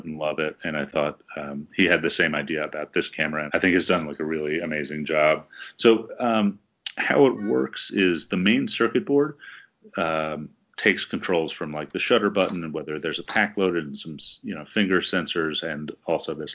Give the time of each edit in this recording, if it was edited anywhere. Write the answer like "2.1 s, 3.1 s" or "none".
3.5 s